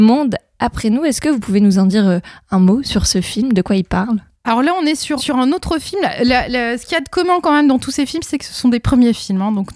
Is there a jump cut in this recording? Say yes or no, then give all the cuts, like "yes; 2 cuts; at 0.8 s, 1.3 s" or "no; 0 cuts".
yes; 1 cut; at 5.2 s